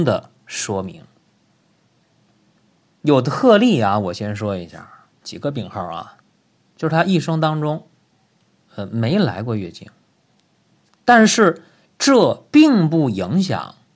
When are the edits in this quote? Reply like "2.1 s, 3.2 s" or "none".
5.2 s